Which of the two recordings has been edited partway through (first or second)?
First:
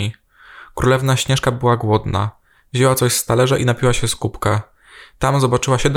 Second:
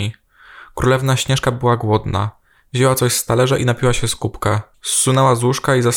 second